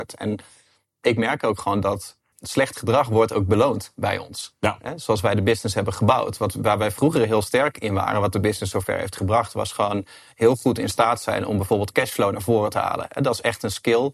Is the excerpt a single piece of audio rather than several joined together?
no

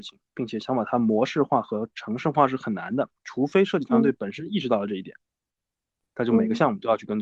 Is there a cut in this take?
no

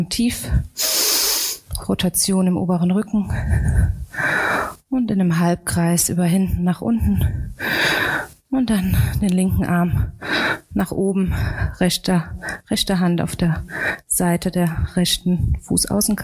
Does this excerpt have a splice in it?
no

